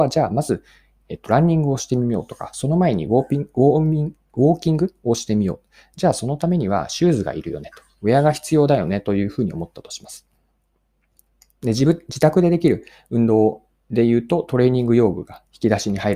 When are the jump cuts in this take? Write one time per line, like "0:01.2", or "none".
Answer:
none